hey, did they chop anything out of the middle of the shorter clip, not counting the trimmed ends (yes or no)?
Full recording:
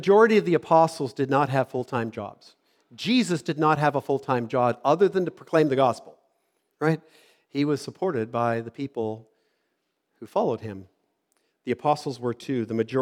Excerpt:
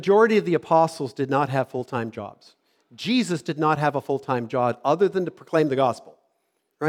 no